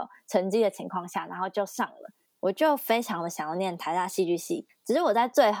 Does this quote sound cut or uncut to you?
cut